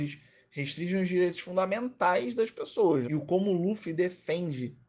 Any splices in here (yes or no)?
yes